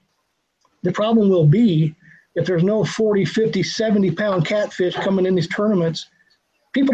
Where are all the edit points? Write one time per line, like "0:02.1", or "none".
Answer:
0:03.6